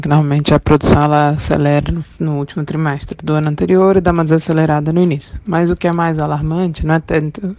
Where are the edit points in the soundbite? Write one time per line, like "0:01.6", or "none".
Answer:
none